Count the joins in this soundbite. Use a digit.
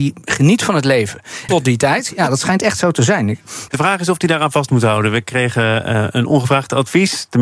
2